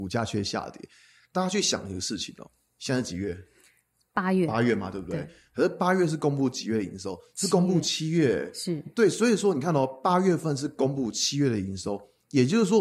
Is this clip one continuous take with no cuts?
yes; 0 cuts

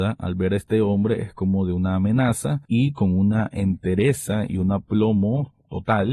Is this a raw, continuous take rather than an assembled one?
no; 1 cut; at 2.6 s

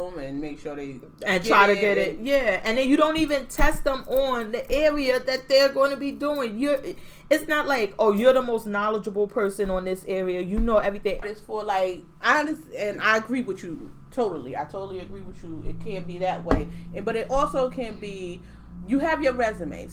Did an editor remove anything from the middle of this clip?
yes; 1 cut; at 11.2 s

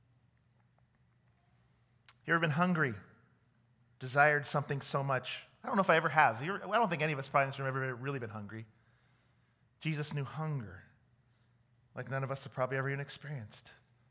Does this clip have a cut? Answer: no; 0 cuts

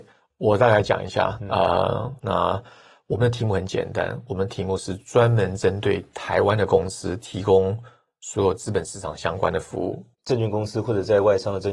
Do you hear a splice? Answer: yes; 2 cuts; at 2.2 s, 10.1 s

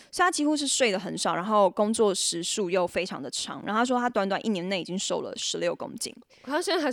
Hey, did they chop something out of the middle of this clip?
no; 0 cuts

